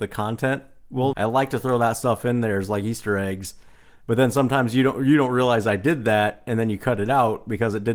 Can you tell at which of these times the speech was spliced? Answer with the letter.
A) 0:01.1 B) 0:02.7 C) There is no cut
A